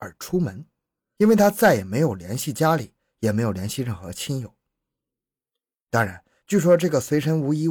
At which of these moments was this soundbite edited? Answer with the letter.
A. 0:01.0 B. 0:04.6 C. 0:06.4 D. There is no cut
A